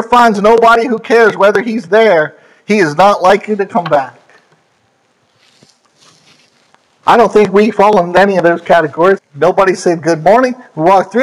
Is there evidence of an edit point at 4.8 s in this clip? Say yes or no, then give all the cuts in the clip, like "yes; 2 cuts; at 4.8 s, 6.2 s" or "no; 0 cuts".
no; 2 cuts; at 7.0 s, 9.2 s